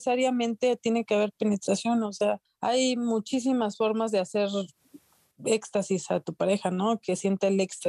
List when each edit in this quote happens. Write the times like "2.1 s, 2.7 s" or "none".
none

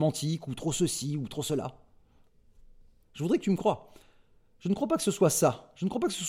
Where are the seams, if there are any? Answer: 3.0 s

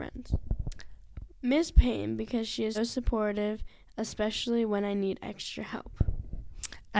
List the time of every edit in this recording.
1.3 s, 2.7 s

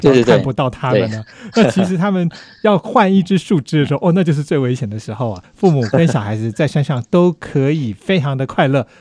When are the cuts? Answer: 5.4 s

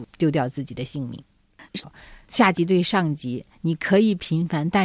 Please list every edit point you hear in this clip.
1.8 s

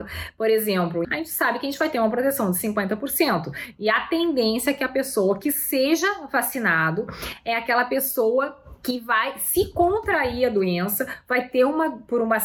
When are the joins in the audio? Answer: 1.0 s

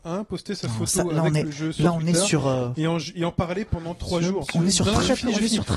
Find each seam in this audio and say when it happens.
none

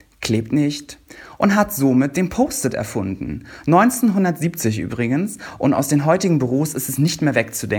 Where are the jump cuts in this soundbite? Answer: none

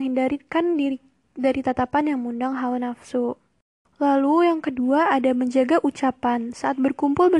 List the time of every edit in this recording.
3.8 s

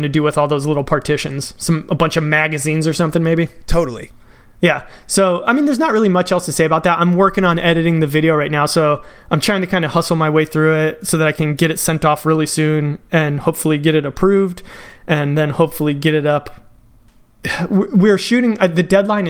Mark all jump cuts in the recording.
none

